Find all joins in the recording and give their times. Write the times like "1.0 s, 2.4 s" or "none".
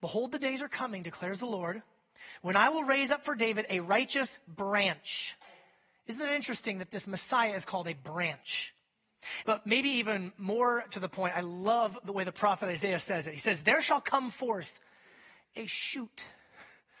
9.4 s